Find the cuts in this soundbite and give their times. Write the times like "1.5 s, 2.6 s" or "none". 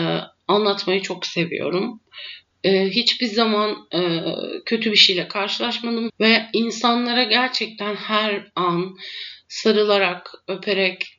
2.5 s, 6.1 s